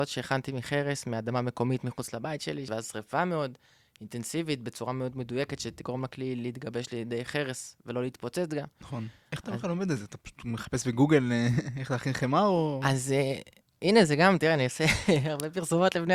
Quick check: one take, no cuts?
no; 1 cut; at 2.7 s

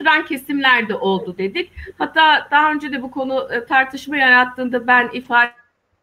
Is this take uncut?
yes; 0 cuts

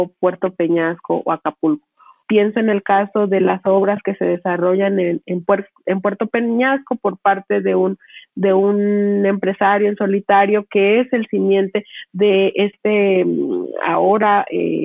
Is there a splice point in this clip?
yes; 1 cut; at 2.2 s

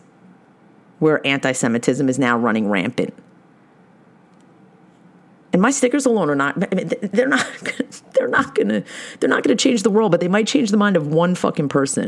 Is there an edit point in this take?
no; 0 cuts

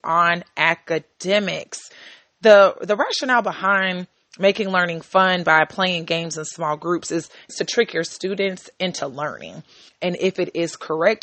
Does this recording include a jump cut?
yes; 2 cuts; at 7.5 s, 9.9 s

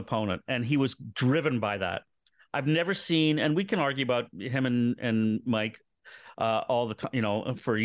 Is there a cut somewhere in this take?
no; 0 cuts

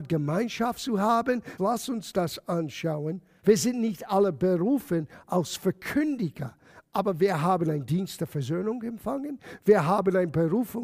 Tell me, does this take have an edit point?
yes; 2 cuts; at 1.6 s, 3.4 s

